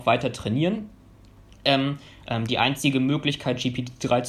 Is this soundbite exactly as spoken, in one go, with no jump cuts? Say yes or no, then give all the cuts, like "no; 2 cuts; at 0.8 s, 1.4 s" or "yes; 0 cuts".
no; 1 cut; at 2.2 s